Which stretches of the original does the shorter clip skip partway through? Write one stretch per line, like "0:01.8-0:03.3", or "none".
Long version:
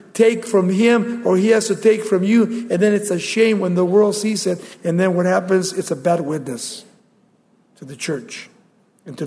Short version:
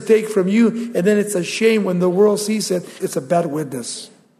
0:04.8-0:05.7